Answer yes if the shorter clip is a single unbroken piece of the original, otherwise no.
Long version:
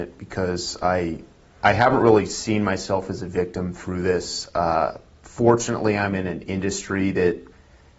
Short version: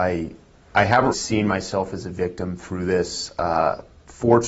no